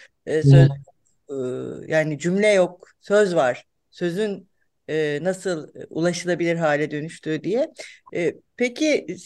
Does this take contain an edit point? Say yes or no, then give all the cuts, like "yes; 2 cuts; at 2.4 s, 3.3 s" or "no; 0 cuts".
no; 0 cuts